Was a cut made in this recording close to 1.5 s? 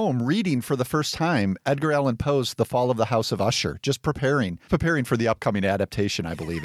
no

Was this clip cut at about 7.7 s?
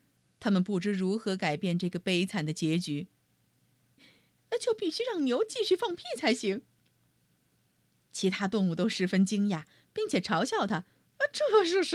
no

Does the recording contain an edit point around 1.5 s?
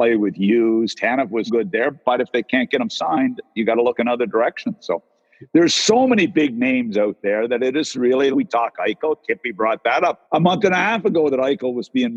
yes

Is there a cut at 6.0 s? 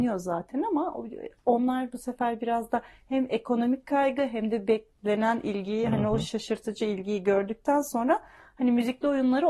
no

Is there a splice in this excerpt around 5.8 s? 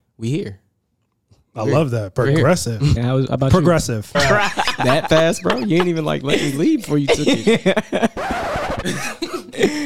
no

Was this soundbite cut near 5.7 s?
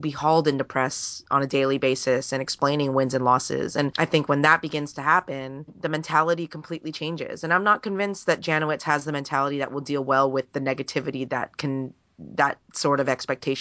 yes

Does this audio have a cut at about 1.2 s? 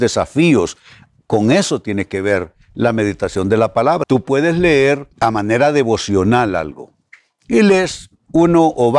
no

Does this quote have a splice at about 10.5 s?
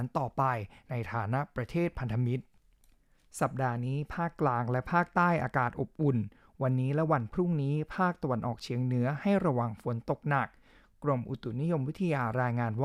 no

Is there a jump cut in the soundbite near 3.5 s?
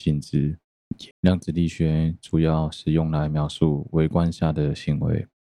no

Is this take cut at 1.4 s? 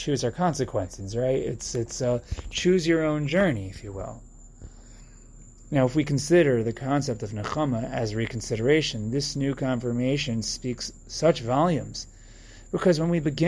no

